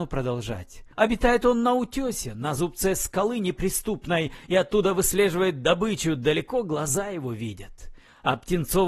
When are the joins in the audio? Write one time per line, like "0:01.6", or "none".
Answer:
0:00.9